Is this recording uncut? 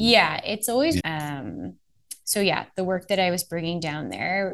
no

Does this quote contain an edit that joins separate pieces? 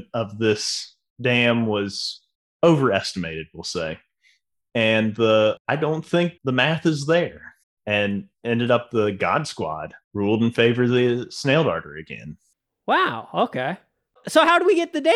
yes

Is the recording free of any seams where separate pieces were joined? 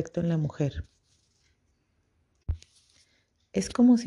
yes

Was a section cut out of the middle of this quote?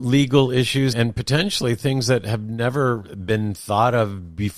yes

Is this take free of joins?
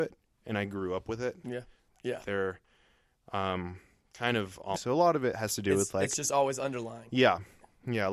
no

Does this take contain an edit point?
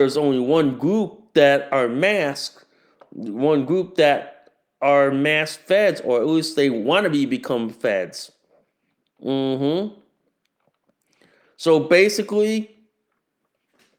no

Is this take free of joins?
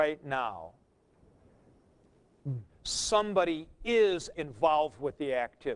no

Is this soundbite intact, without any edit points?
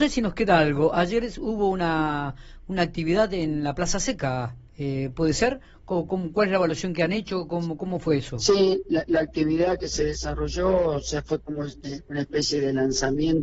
yes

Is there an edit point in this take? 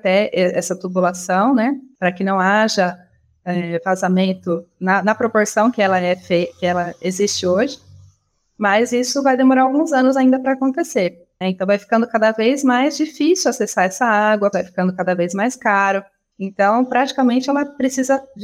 yes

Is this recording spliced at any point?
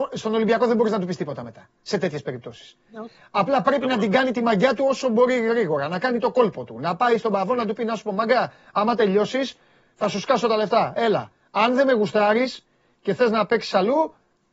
no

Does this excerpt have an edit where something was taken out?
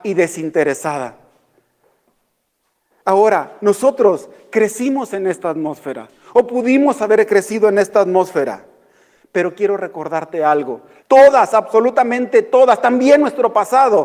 yes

